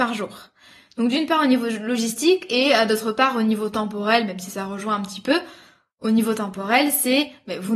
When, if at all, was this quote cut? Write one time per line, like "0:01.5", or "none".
none